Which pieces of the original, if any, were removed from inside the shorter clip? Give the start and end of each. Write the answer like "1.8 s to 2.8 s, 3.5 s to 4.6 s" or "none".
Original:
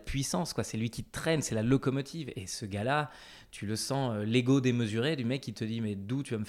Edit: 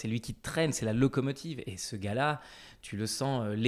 none